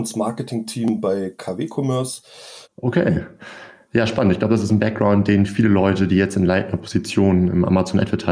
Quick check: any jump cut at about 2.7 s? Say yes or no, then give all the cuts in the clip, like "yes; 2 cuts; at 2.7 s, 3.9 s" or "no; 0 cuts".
yes; 1 cut; at 2.7 s